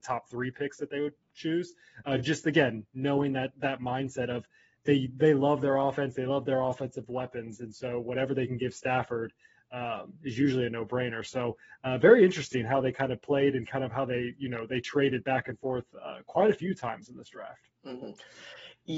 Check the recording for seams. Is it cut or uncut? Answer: uncut